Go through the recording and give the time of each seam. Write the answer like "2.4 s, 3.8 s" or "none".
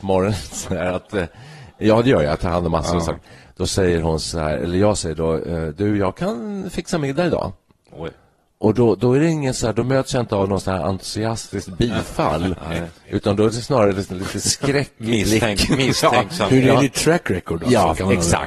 none